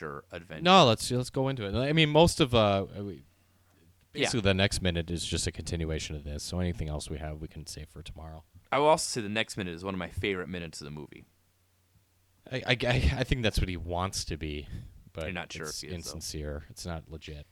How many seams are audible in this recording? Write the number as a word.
one